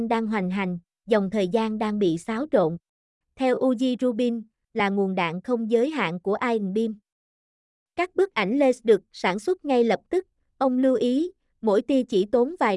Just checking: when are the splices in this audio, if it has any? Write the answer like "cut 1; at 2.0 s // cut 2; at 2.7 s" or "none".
cut 1; at 3.2 s // cut 2; at 4.6 s